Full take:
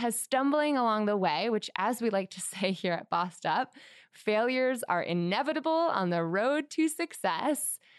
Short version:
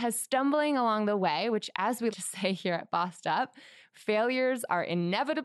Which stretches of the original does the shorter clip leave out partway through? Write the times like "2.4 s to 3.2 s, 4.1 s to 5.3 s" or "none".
2.1 s to 2.3 s